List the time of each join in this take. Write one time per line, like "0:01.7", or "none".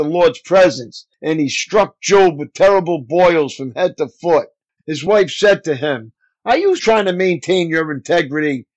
0:04.8
0:06.8